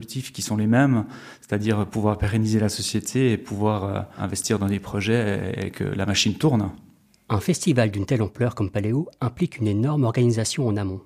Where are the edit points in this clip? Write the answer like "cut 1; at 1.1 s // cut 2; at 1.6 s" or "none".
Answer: none